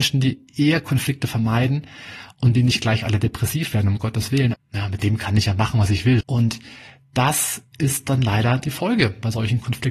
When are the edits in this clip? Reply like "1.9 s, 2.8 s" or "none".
4.5 s, 6.2 s